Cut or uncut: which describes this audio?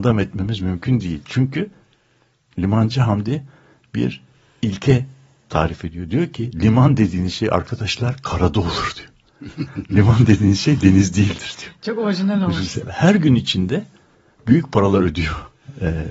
cut